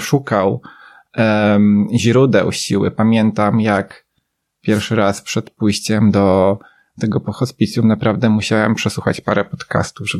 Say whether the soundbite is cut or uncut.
uncut